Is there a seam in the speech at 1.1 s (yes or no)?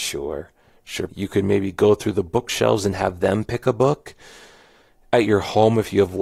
yes